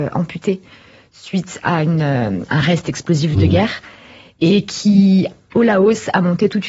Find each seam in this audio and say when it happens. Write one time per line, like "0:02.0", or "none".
none